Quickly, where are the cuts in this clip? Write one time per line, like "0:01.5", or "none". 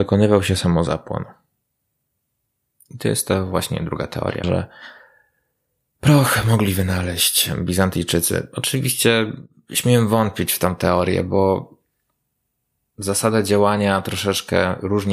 0:04.4